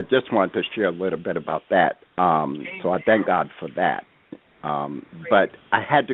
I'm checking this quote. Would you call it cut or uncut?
cut